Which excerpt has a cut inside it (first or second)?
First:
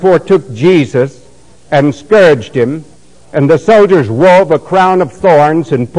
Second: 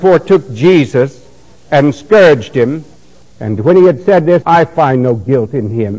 second